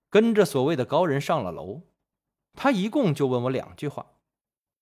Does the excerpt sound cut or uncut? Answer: uncut